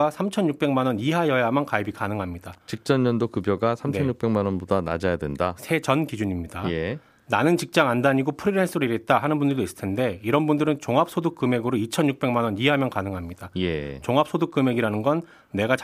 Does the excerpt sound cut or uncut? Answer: uncut